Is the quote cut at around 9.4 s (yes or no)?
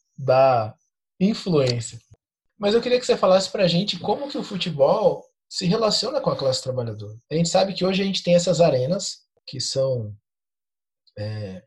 yes